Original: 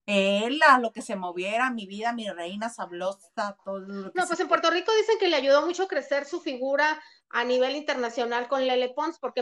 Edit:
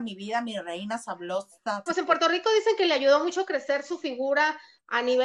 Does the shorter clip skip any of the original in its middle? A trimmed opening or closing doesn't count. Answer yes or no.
yes